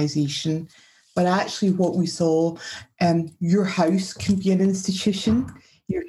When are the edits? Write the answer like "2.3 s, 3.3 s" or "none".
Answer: none